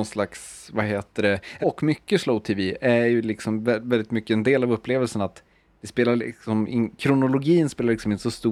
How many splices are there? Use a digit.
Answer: 1